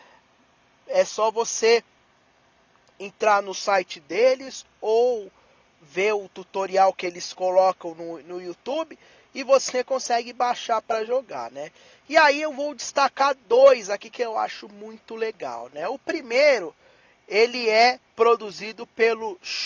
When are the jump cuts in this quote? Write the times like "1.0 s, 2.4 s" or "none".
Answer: 18.1 s